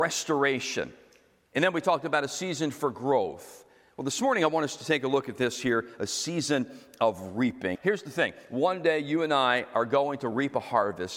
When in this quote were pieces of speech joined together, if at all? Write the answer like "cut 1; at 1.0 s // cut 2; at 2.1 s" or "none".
cut 1; at 7.8 s